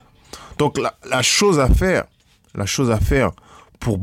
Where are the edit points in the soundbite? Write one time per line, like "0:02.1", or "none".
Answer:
0:01.0